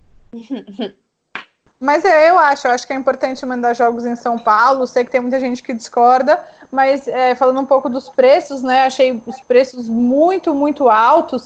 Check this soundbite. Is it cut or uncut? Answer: uncut